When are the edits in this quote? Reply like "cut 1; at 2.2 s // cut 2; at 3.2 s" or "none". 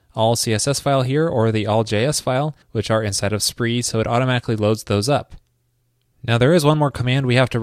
cut 1; at 2.6 s